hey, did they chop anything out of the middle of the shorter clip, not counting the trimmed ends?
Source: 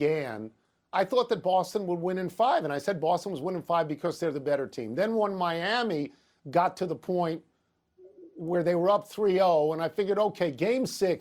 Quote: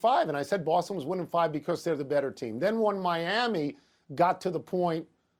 no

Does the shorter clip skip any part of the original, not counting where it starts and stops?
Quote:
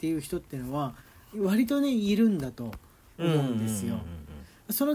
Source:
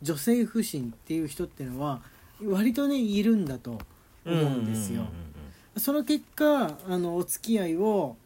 no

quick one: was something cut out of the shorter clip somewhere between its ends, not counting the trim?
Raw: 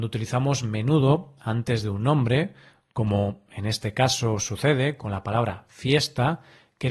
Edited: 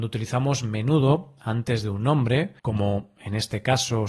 yes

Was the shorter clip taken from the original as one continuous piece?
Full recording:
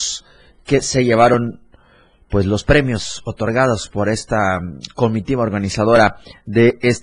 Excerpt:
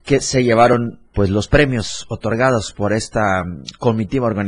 no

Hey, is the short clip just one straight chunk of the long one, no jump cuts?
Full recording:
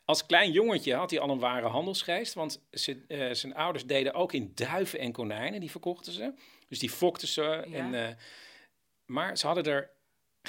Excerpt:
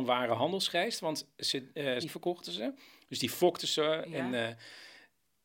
no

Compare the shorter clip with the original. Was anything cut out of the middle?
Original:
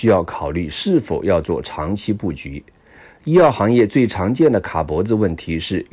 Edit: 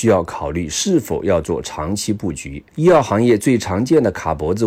yes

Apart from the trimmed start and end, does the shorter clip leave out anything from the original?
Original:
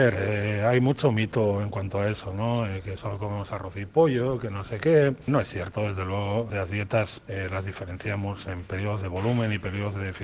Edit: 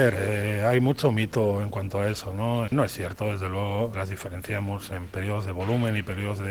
yes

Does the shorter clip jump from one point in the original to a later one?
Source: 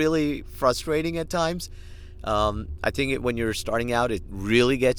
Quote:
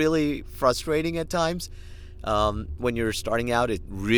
yes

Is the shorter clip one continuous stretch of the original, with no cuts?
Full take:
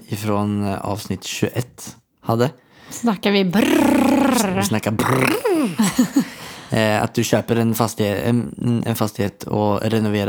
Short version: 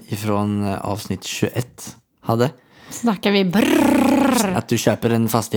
no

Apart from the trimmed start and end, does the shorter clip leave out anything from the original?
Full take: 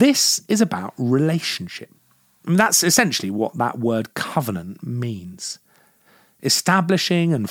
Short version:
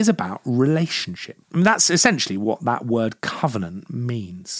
yes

